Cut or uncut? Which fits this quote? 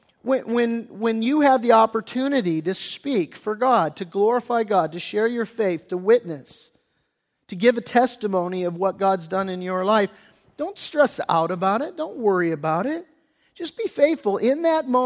uncut